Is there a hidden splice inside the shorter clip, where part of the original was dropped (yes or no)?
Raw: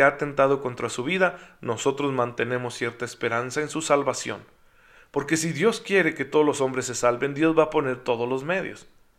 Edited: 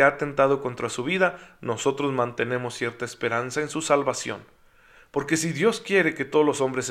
no